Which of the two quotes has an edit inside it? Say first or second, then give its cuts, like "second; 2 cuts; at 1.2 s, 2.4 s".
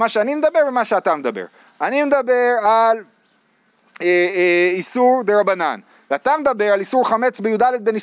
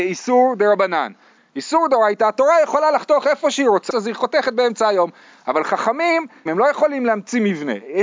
second; 3 cuts; at 1.4 s, 3.9 s, 6.5 s